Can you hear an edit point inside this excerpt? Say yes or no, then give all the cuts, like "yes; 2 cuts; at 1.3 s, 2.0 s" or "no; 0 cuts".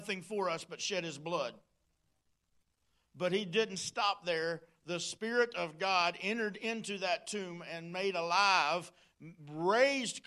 no; 0 cuts